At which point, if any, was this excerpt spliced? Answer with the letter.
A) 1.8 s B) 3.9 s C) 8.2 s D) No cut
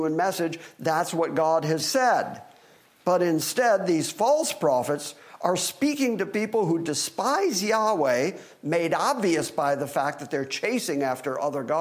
A